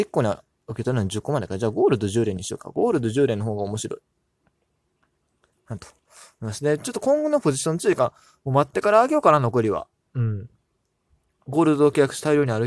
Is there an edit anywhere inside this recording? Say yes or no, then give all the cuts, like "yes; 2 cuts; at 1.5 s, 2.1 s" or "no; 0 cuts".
no; 0 cuts